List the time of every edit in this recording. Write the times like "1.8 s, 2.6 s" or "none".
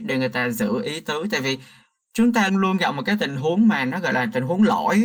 2.5 s